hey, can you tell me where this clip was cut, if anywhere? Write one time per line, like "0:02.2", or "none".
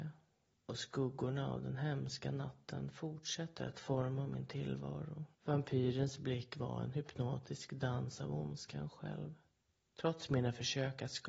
0:05.3